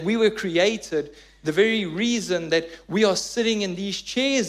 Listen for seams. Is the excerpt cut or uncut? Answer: uncut